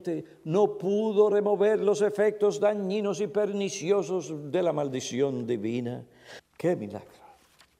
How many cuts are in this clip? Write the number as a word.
one